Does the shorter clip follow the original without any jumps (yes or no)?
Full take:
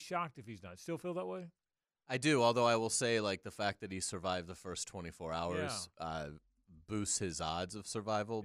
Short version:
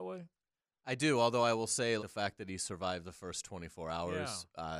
no